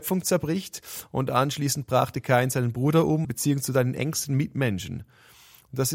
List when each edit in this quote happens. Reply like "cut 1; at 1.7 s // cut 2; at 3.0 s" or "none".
cut 1; at 3.2 s